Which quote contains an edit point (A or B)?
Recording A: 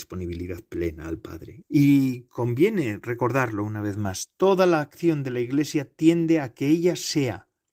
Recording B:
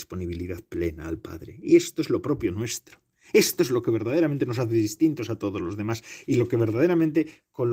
A